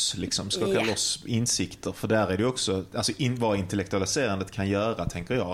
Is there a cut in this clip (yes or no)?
no